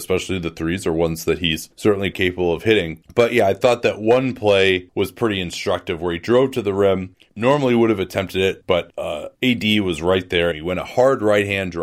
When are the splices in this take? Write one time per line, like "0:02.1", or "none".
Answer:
0:02.1
0:10.5